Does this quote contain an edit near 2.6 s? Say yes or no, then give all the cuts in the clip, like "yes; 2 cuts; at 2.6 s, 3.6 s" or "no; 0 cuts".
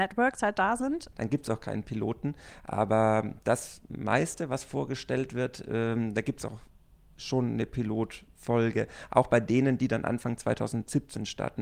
no; 1 cut; at 1.1 s